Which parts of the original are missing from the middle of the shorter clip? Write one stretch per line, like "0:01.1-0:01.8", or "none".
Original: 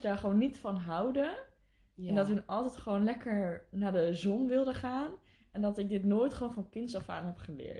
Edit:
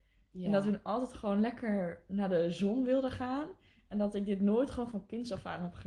none